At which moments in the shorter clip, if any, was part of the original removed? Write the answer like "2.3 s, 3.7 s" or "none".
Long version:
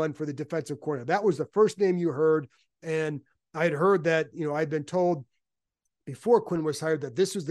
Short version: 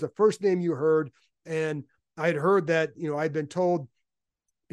none